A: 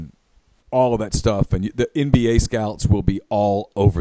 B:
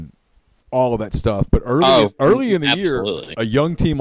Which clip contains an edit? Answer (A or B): B